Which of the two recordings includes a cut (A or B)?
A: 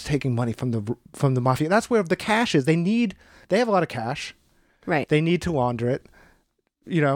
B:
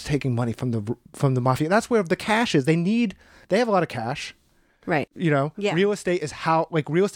B